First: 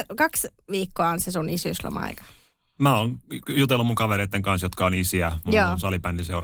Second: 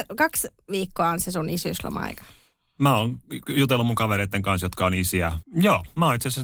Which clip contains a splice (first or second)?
second